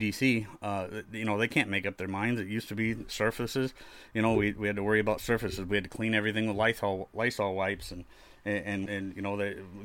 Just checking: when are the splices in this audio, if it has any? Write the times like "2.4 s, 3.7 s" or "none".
8.9 s